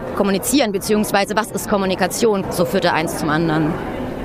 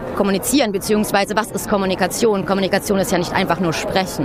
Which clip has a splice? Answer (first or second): first